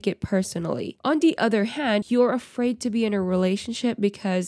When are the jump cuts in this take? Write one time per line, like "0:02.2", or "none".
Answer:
0:01.0
0:02.0